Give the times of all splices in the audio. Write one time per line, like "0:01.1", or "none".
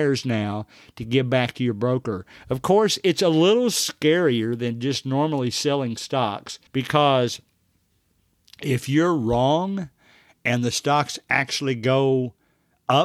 0:06.7